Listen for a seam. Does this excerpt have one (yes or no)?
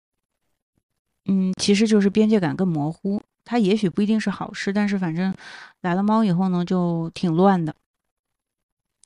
no